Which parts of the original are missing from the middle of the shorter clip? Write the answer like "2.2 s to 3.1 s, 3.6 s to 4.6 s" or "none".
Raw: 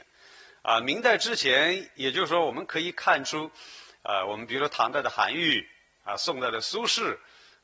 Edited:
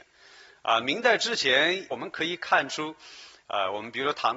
1.9 s to 2.5 s